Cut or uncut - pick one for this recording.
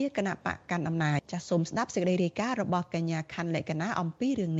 cut